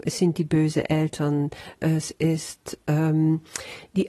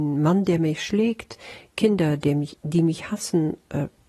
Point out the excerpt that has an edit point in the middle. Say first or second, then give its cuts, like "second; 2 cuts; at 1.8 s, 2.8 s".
first; 1 cut; at 1.8 s